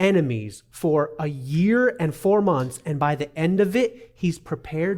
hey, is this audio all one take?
yes; 0 cuts

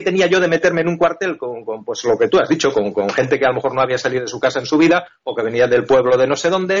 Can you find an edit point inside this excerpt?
no; 0 cuts

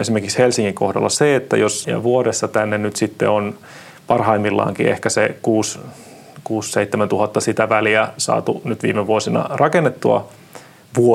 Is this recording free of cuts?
no; 1 cut; at 1.8 s

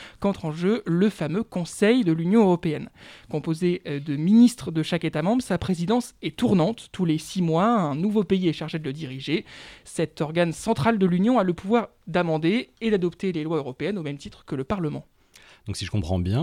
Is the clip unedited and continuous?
yes; 0 cuts

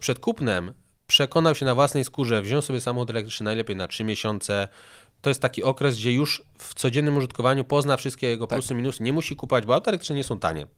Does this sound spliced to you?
no; 0 cuts

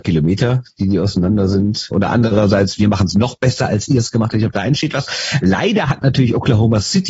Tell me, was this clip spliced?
yes; 1 cut; at 1.9 s

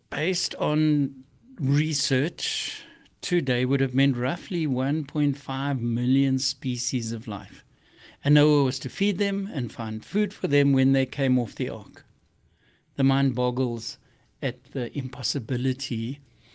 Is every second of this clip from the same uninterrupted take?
yes; 0 cuts

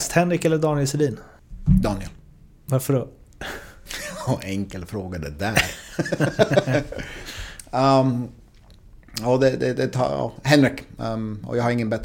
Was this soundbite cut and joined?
no; 0 cuts

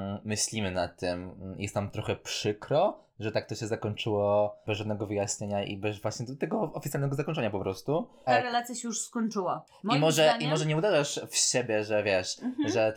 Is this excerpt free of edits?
no; 1 cut; at 8.3 s

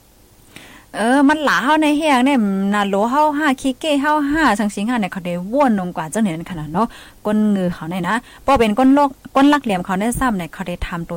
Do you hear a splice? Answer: no; 0 cuts

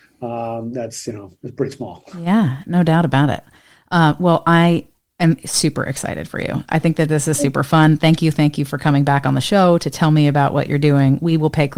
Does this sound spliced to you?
no; 0 cuts

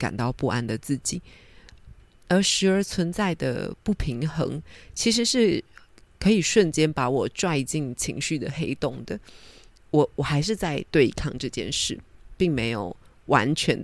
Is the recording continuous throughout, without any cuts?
yes; 0 cuts

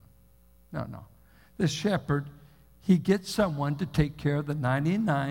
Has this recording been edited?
no; 0 cuts

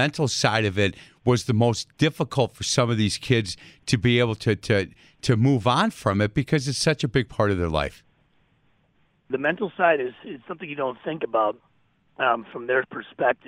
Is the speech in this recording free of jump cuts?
no; 1 cut; at 9.3 s

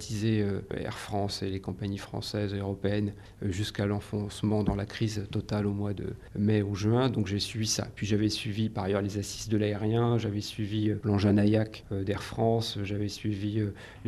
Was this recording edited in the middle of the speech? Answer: no; 0 cuts

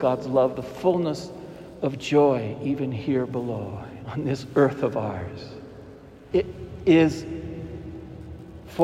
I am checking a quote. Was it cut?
yes; 1 cut; at 6.3 s

